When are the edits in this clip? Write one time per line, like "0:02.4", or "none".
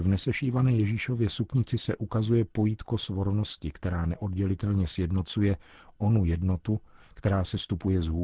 none